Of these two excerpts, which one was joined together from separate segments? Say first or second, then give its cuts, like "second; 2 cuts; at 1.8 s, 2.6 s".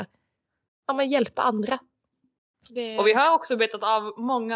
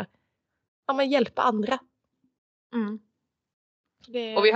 first; 1 cut; at 2.5 s